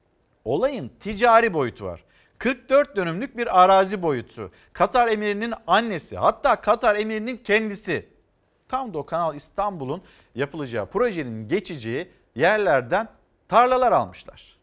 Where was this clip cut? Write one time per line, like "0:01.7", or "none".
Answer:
none